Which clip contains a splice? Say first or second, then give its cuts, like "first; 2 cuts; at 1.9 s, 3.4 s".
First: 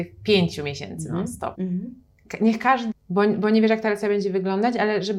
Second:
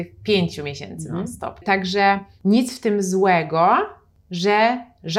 first; 2 cuts; at 1.5 s, 2.9 s